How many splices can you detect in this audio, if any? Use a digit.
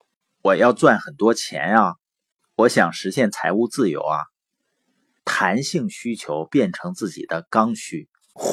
1